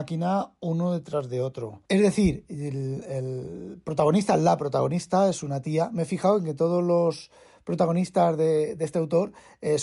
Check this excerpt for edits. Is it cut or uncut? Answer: cut